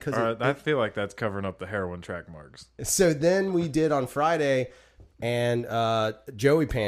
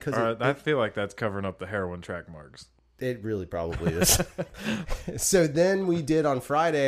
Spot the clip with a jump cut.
first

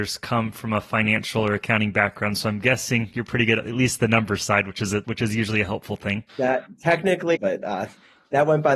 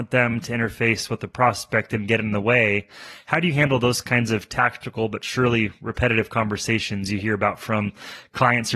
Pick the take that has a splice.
first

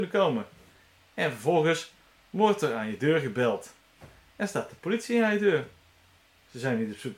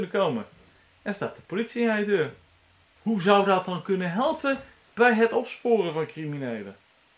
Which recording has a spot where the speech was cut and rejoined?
second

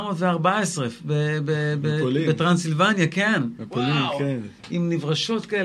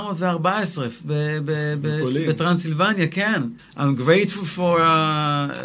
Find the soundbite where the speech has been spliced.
second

